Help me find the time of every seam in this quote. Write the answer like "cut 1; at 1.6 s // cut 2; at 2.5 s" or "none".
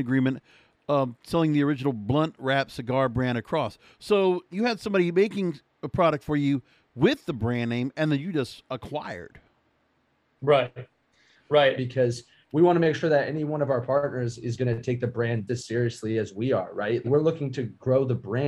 cut 1; at 11.8 s // cut 2; at 15.5 s // cut 3; at 17.0 s